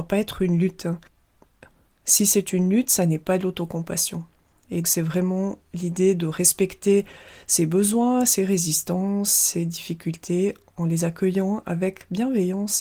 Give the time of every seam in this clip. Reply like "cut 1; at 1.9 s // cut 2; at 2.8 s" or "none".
cut 1; at 4.8 s